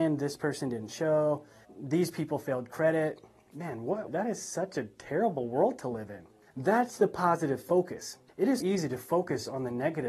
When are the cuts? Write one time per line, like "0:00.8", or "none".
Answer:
0:04.1
0:06.5
0:08.6